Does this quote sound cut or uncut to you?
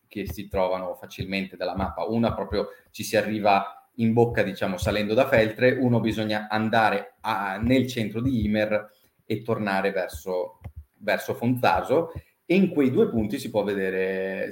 cut